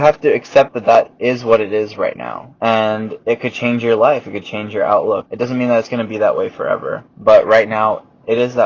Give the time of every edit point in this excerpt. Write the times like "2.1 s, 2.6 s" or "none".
2.6 s, 5.3 s, 7.1 s